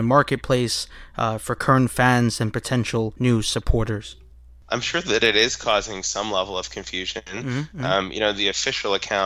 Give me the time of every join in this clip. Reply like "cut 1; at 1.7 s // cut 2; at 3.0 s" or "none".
none